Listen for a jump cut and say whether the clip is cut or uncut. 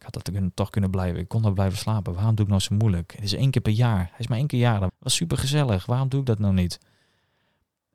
cut